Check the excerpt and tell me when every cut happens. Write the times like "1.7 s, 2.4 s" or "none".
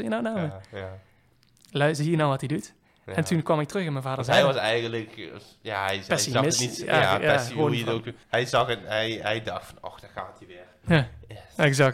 8.2 s